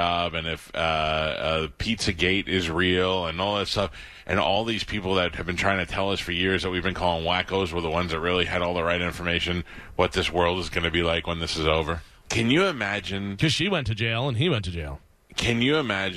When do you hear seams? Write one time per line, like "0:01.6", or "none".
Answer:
0:12.2